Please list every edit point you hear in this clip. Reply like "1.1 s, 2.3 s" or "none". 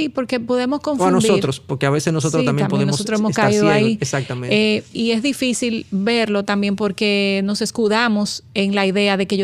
4.9 s